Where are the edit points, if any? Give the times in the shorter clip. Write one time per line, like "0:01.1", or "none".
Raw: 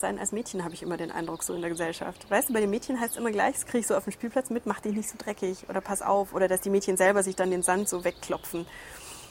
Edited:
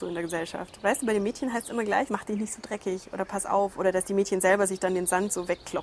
0:02.1